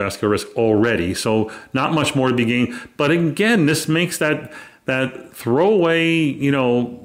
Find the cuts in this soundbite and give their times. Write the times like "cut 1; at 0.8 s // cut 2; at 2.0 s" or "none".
none